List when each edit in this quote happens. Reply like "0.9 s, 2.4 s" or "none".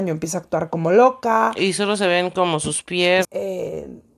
3.2 s